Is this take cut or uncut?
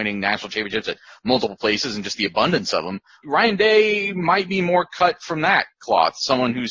cut